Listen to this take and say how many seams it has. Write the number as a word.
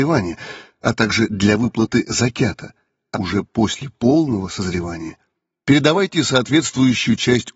one